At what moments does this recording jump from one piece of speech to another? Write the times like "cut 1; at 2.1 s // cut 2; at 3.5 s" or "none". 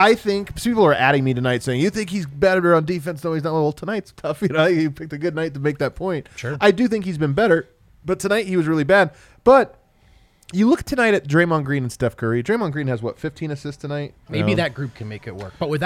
cut 1; at 14.3 s